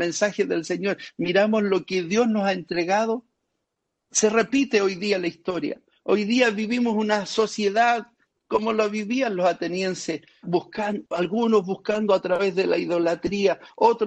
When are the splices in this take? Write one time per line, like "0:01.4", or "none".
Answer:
0:10.4